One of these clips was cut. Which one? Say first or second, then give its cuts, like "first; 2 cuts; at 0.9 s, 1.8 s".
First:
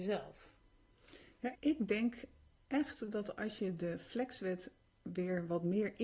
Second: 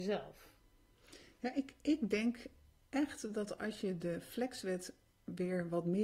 first; 1 cut; at 1.5 s